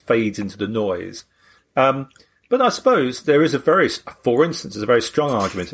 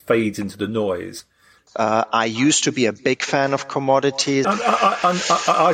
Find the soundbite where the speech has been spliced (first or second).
second